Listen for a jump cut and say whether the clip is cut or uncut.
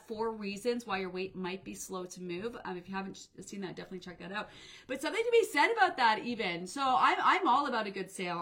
uncut